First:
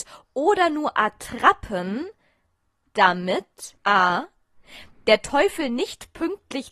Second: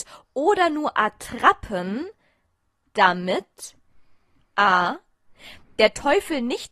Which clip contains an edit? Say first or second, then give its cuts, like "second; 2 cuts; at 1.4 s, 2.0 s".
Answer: first; 1 cut; at 3.8 s